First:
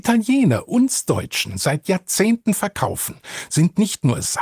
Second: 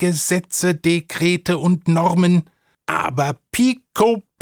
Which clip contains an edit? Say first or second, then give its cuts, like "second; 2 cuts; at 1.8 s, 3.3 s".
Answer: second; 1 cut; at 2.7 s